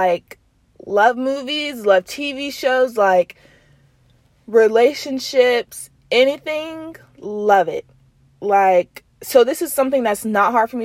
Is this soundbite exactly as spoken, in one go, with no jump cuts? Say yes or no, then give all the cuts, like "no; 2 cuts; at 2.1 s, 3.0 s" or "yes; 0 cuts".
yes; 0 cuts